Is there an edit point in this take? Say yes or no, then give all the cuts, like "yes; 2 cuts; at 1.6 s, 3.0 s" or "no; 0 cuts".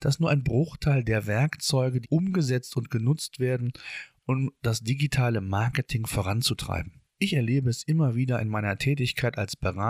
yes; 2 cuts; at 2.0 s, 7.1 s